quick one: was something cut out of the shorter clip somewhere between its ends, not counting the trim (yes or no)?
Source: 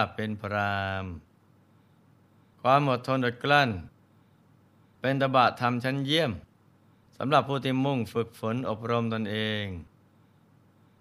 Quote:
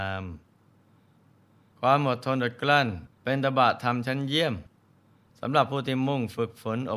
yes